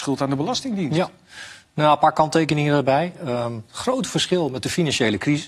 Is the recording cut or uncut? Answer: uncut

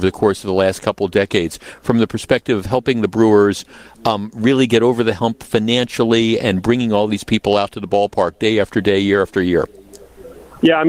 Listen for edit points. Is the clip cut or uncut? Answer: uncut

